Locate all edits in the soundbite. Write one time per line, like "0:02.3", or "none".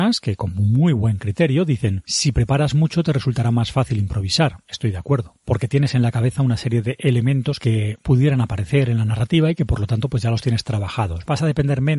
none